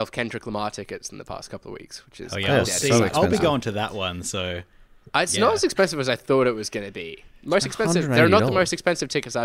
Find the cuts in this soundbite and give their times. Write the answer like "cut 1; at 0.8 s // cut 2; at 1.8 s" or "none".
none